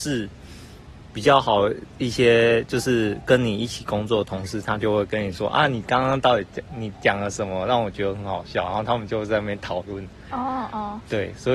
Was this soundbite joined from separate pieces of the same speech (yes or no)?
no